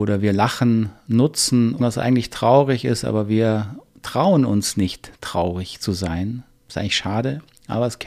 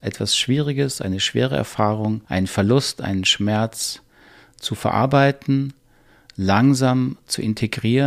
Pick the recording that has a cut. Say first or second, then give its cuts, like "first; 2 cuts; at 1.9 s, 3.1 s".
first; 1 cut; at 1.8 s